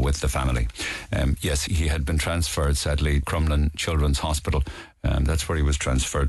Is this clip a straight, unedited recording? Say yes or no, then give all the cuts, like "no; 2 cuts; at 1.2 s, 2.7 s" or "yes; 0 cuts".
no; 2 cuts; at 1.7 s, 3.2 s